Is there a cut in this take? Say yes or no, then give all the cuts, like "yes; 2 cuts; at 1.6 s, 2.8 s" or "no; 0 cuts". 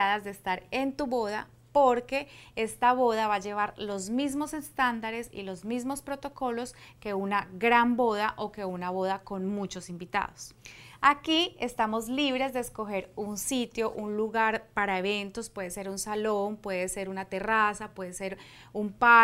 no; 0 cuts